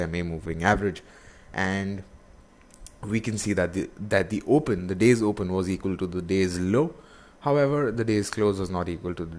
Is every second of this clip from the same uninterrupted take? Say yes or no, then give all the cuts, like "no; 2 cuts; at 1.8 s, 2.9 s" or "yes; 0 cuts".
yes; 0 cuts